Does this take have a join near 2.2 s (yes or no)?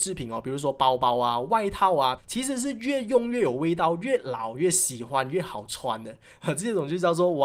yes